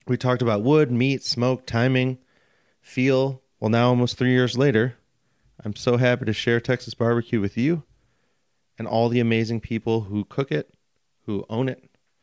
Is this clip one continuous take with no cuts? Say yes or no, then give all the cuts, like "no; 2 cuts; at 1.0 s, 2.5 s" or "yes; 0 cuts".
no; 1 cut; at 3.5 s